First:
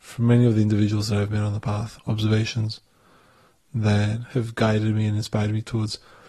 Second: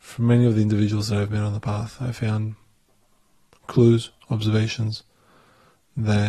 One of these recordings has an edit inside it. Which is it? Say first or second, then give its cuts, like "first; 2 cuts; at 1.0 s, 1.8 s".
first; 1 cut; at 2.0 s